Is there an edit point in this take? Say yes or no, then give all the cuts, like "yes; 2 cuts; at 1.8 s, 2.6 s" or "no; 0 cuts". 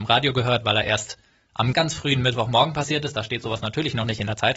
yes; 1 cut; at 1.7 s